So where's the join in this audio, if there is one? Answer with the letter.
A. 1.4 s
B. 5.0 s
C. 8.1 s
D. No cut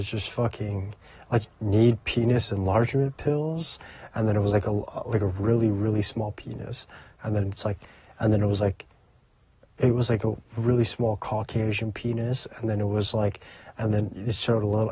A